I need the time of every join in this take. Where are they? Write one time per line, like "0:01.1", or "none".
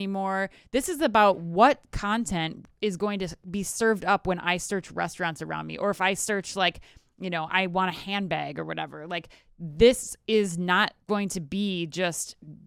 0:11.0